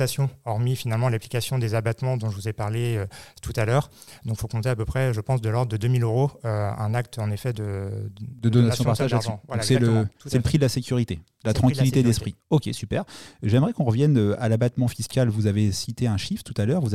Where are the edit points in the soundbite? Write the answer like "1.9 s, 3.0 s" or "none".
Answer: 12.4 s